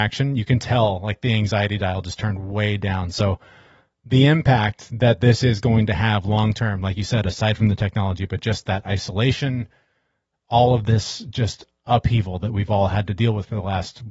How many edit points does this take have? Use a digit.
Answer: 0